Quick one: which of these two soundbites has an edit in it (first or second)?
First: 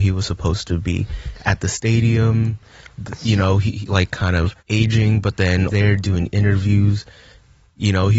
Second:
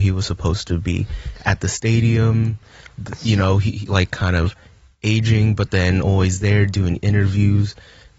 first